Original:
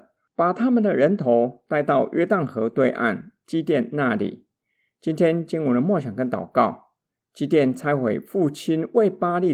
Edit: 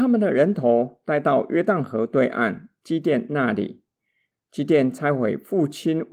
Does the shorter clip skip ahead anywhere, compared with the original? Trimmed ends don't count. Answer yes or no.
yes